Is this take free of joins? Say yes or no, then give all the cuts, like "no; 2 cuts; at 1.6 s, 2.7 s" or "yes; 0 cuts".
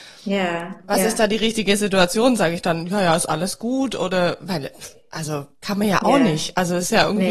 yes; 0 cuts